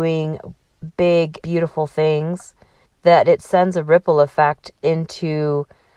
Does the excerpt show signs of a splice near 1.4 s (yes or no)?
yes